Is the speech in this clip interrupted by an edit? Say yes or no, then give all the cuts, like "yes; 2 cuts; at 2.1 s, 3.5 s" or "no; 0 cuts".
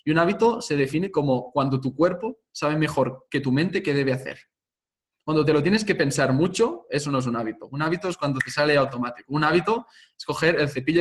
no; 0 cuts